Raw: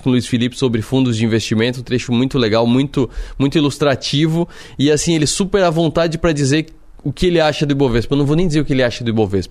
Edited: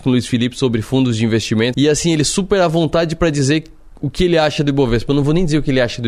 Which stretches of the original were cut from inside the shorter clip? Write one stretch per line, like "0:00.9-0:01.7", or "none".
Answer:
0:01.7-0:04.8